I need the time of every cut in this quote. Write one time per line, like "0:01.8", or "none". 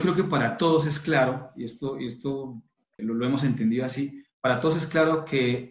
0:03.0